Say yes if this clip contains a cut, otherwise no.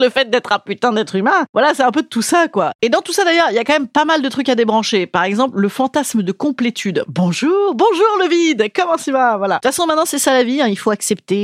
yes